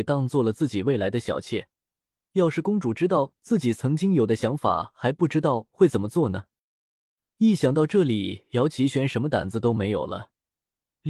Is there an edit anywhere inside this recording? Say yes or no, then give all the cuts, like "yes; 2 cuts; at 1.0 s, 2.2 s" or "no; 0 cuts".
no; 0 cuts